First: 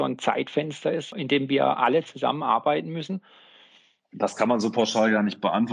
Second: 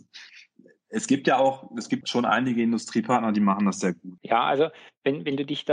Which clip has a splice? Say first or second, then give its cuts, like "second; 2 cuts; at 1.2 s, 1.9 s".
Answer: second; 2 cuts; at 2.0 s, 4.2 s